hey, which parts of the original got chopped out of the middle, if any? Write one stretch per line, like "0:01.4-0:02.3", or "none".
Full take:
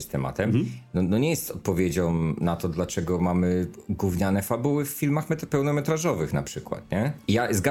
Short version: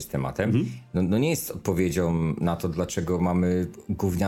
none